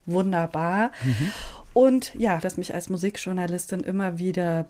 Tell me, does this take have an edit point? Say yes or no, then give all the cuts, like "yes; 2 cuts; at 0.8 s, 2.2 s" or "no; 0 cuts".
yes; 1 cut; at 2.4 s